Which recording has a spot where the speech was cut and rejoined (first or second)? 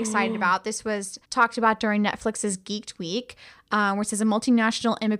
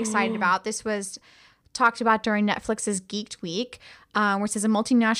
first